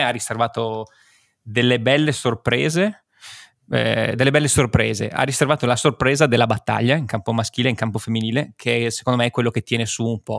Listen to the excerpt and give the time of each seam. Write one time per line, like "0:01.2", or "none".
none